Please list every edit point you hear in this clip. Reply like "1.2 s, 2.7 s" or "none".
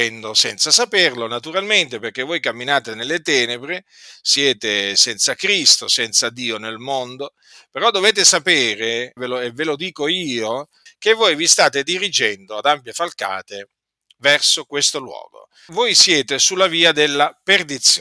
9.2 s, 10.9 s, 15.7 s